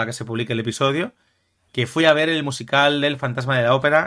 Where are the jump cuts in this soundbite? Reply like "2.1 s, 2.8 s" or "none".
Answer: none